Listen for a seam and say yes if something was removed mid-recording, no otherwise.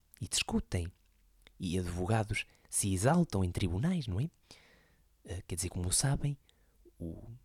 no